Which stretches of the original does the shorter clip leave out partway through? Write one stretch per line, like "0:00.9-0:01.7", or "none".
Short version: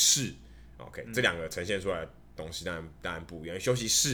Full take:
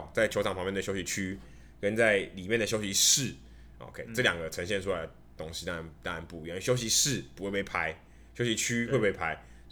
none